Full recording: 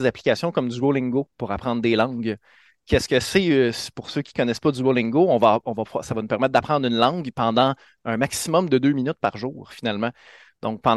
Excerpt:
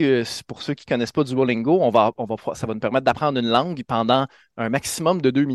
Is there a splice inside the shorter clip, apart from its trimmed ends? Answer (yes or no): no